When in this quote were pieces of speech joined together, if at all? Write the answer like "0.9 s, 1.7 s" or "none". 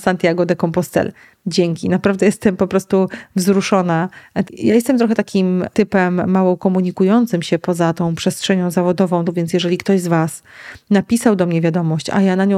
4.4 s, 9.3 s

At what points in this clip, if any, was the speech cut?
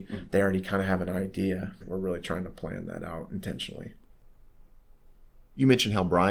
1.8 s

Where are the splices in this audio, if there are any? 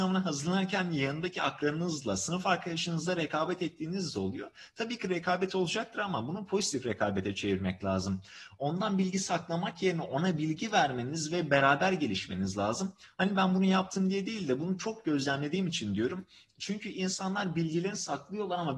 none

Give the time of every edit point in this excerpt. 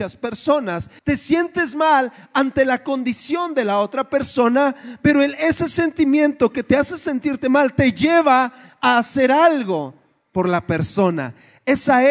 1.0 s

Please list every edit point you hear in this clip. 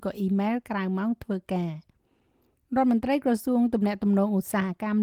none

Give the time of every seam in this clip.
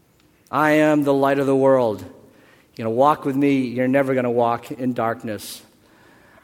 none

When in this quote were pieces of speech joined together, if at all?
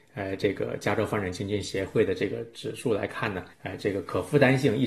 3.5 s

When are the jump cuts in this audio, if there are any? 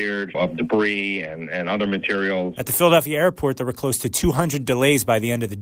2.6 s

